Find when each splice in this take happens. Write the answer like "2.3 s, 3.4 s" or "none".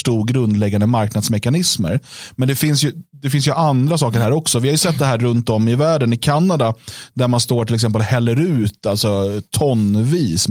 none